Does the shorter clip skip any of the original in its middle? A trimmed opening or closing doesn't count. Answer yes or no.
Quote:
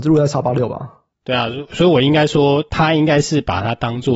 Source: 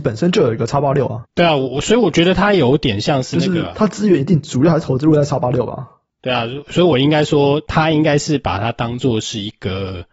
no